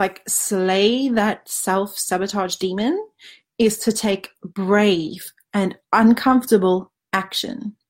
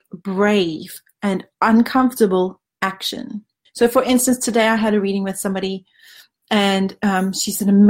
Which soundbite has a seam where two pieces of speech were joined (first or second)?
second